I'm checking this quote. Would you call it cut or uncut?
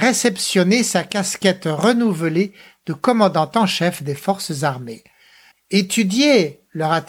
cut